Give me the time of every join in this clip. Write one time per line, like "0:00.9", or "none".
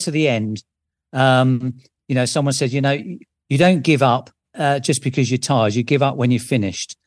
0:04.4

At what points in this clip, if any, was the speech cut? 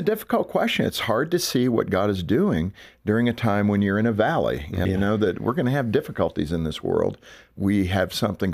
0:04.8
0:07.6

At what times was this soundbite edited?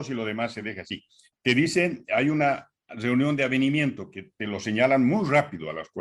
0:01.3

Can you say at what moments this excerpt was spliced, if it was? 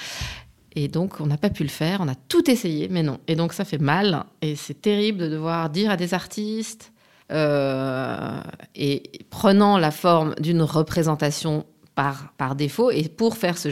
0:07.2

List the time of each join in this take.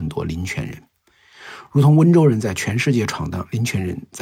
none

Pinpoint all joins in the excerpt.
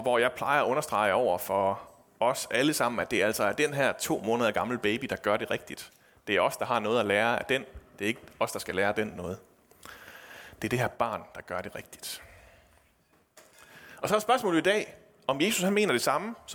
none

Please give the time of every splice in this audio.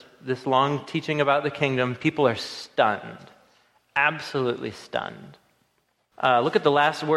0:06.1

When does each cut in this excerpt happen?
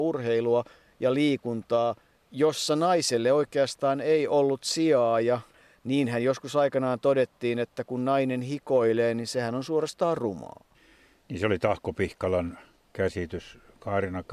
none

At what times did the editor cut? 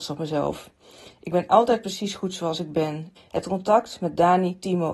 0:03.2

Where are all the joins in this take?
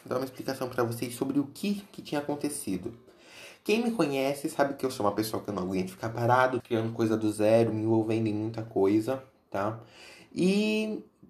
0:06.6

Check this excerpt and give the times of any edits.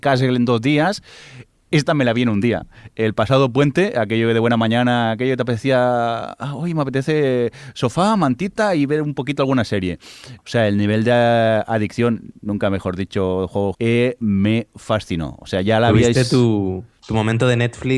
0:10.4
0:13.7

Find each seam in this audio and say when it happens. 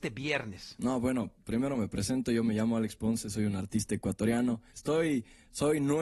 0:04.7

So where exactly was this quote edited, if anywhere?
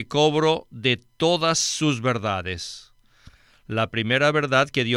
none

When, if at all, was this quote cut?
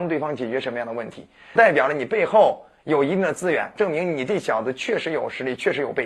0:01.6
0:03.8

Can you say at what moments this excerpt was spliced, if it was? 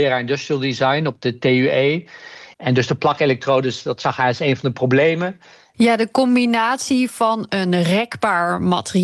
0:02.5
0:05.7

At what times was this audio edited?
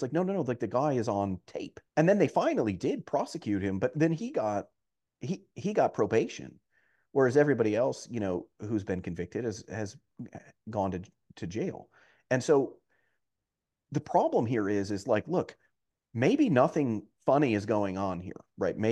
0:01.9

